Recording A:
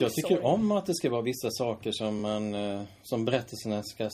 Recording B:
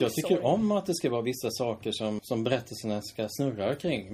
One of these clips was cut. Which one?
B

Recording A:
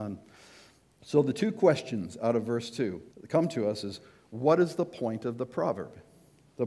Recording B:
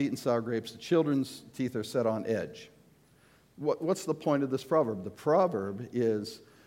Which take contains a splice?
A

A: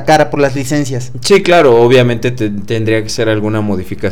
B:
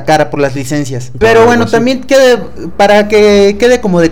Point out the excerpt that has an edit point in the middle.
B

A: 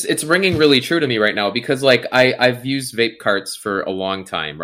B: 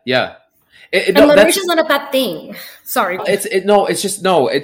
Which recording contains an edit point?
B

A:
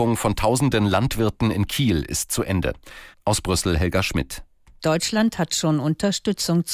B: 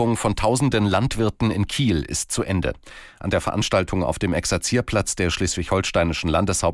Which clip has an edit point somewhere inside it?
A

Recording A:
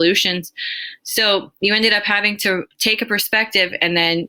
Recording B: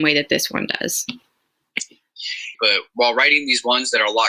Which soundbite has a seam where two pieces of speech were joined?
B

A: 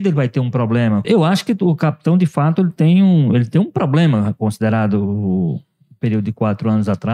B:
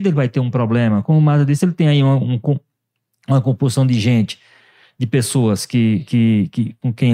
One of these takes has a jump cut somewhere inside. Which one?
A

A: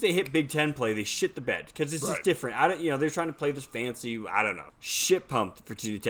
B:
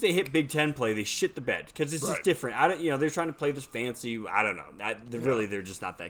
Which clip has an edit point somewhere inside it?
A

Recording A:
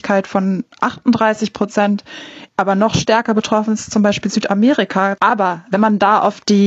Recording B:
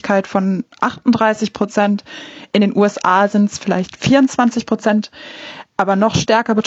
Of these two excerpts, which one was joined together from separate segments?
A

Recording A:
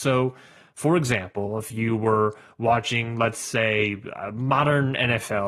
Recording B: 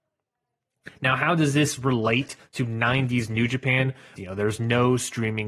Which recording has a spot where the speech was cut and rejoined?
B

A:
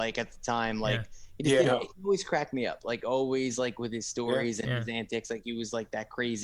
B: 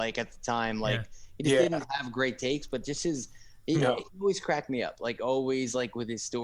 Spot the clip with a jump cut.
A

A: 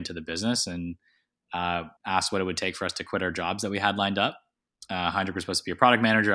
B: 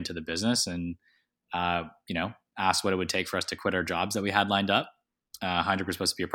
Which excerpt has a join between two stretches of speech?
A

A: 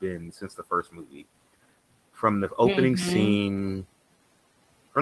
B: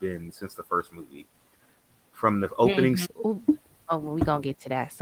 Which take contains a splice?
B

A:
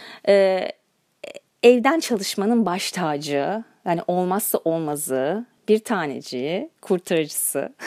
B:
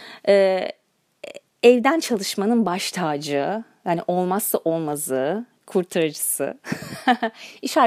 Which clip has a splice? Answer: B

